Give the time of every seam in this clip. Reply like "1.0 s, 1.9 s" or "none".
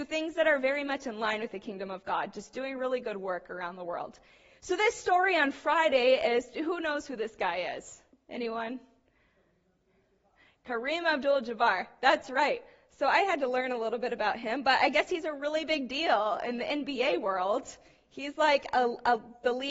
none